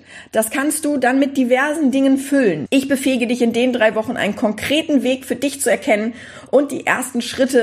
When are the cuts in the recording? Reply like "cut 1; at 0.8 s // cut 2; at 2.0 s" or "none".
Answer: cut 1; at 2.7 s